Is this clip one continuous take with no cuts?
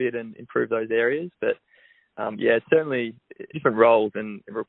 no; 1 cut; at 3.5 s

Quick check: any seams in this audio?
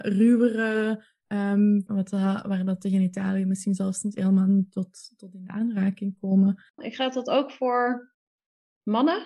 yes; 2 cuts; at 1.9 s, 6.8 s

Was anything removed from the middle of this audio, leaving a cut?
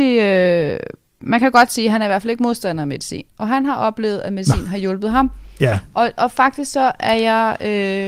no; 0 cuts

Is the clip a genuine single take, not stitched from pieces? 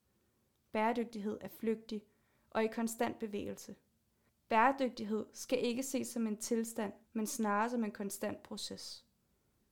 no; 2 cuts; at 4.3 s, 7.0 s

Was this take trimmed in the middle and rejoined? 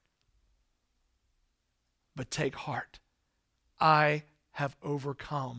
yes; 1 cut; at 2.0 s

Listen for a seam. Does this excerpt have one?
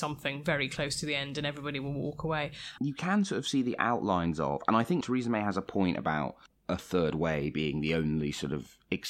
yes; 2 cuts; at 2.8 s, 5.0 s

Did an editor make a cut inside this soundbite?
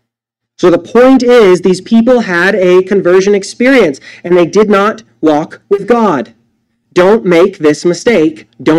no; 0 cuts

